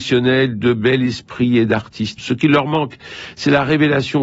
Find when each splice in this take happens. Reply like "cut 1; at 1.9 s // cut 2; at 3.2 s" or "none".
cut 1; at 2.2 s